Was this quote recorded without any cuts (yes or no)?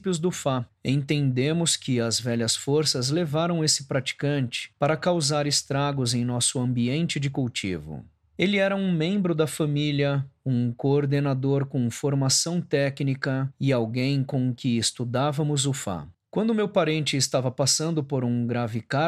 no